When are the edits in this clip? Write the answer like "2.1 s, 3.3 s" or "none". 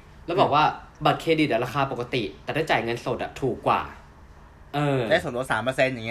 4.7 s